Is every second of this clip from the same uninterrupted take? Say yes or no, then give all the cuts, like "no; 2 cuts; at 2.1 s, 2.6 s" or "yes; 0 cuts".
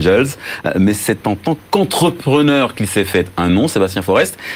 yes; 0 cuts